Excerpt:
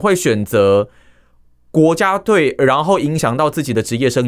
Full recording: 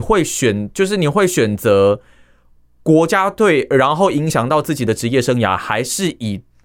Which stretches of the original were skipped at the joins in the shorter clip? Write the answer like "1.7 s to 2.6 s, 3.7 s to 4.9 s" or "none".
none